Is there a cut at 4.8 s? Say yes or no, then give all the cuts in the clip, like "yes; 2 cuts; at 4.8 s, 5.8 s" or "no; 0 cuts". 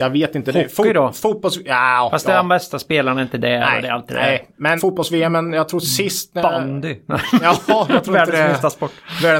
yes; 1 cut; at 4.8 s